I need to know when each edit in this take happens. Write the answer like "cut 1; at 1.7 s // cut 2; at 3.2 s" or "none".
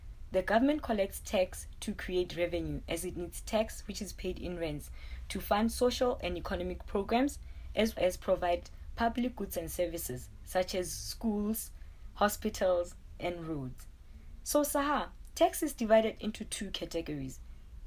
cut 1; at 8.0 s